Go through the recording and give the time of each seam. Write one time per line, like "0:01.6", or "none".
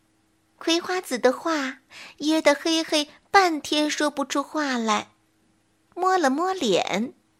0:05.9